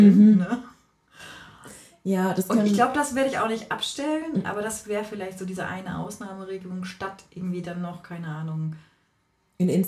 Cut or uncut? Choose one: uncut